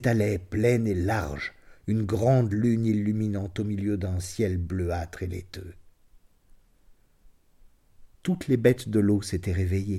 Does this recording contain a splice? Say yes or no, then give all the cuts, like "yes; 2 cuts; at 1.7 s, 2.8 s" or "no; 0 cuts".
no; 0 cuts